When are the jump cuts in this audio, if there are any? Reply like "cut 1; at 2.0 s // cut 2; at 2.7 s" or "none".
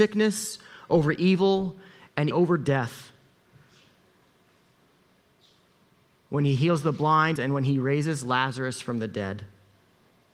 cut 1; at 2.3 s // cut 2; at 7.4 s